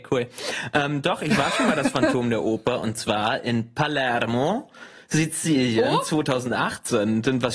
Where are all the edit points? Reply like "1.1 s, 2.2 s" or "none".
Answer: none